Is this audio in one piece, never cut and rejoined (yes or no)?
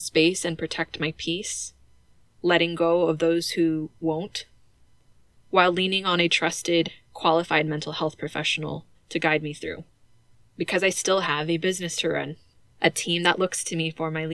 yes